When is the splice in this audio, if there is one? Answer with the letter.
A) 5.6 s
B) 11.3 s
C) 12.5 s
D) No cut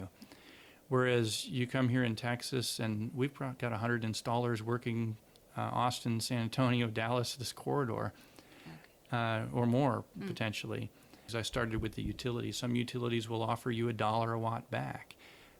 B